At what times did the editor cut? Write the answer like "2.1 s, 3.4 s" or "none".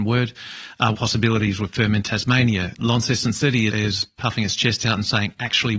0.9 s, 3.7 s